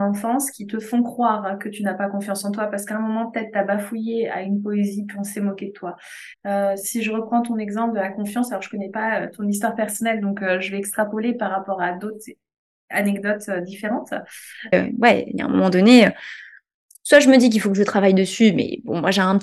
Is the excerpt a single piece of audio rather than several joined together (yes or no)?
no